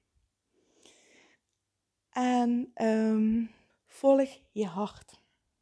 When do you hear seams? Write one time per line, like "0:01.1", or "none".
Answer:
0:03.7